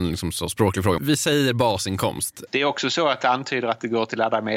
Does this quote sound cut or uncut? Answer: cut